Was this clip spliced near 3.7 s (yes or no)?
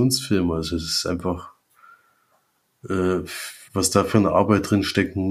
yes